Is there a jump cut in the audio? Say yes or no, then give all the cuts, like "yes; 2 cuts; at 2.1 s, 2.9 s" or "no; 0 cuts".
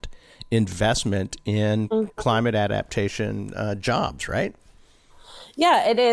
no; 0 cuts